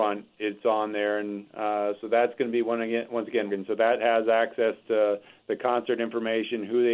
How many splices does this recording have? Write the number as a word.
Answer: one